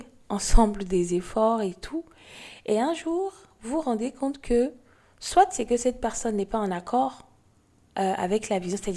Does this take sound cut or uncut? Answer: uncut